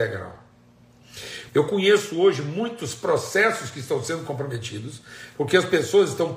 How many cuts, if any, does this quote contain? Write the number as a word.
one